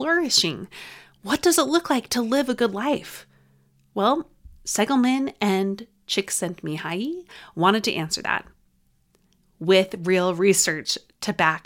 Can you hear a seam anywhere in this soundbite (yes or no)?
no